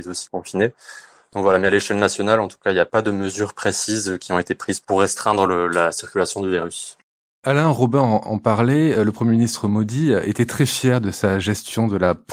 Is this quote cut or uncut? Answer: uncut